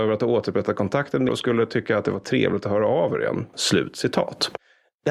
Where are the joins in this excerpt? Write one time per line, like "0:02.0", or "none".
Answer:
0:01.3
0:03.5